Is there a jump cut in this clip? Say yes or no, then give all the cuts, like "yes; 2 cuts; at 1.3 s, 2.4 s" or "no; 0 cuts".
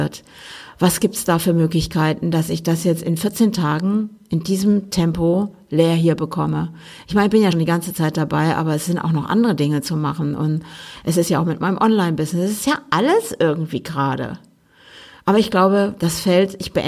yes; 1 cut; at 7.5 s